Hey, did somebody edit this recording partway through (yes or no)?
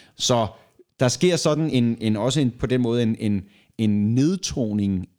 no